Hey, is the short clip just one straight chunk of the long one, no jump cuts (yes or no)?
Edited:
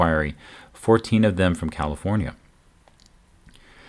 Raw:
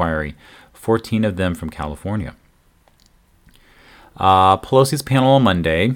yes